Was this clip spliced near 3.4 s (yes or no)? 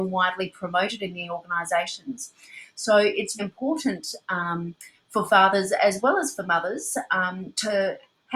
yes